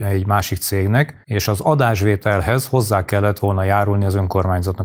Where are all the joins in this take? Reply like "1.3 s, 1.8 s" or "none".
1.2 s